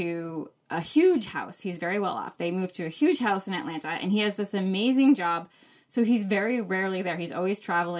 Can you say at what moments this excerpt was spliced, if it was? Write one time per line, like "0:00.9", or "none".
none